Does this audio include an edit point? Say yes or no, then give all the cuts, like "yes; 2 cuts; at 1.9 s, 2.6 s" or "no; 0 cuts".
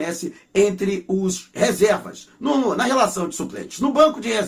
no; 0 cuts